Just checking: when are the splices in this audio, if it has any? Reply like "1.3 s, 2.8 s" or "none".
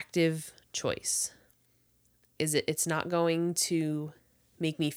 2.4 s